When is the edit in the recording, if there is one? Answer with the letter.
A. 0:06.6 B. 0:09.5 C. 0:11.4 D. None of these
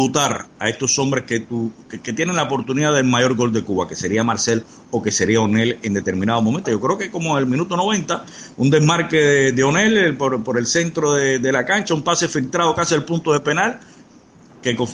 A